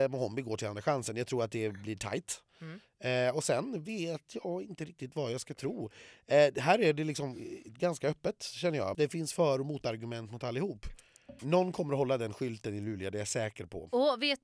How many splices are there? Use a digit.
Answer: 2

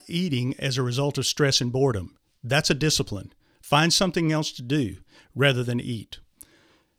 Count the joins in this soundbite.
0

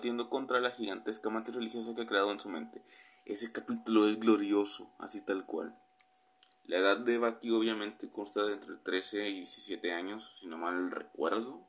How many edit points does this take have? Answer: 0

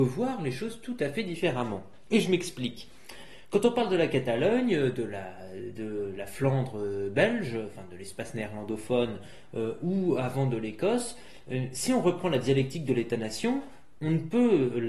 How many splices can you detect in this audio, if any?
0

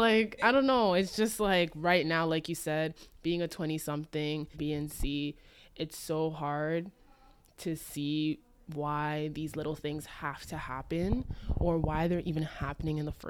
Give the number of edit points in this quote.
1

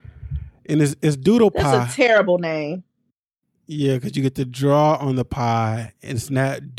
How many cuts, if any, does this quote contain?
0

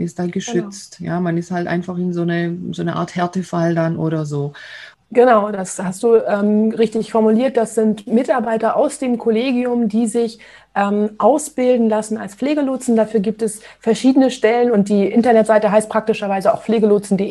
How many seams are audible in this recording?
1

